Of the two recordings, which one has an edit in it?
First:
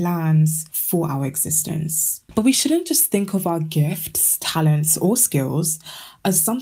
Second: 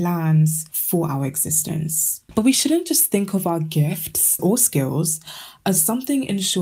second; 1 cut; at 4.4 s

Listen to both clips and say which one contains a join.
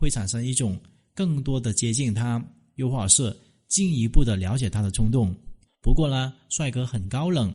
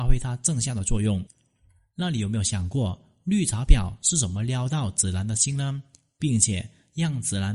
first; 1 cut; at 5.7 s

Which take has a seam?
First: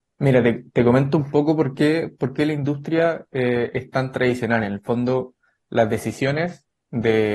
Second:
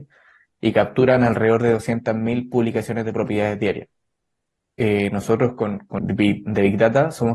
second; 1 cut; at 6.0 s

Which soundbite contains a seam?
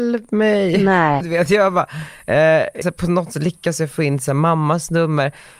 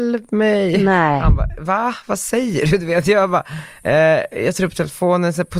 first; 2 cuts; at 1.2 s, 2.8 s

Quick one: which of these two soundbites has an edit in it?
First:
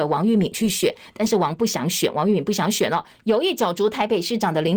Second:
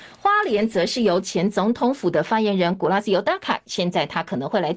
first; 1 cut; at 3.1 s

